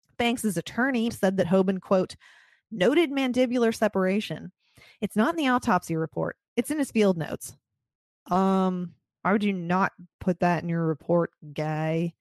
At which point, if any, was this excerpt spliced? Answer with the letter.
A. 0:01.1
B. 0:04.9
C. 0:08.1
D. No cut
A